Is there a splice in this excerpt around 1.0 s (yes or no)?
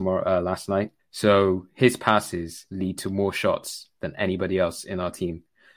yes